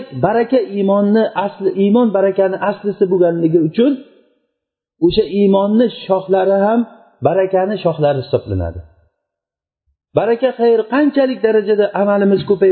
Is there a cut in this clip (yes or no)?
no